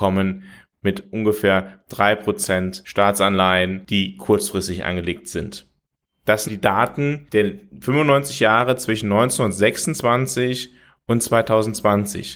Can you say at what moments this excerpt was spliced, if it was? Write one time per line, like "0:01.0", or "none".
0:06.5